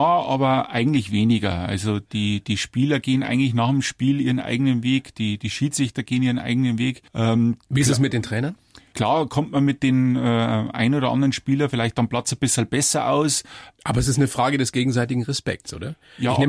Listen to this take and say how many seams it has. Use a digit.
3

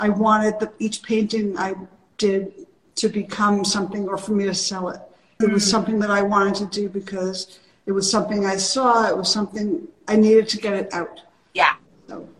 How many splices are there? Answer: 1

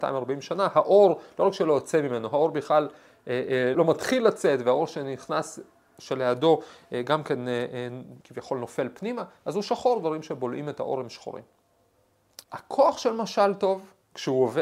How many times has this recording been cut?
3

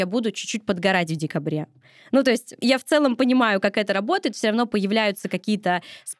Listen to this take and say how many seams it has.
0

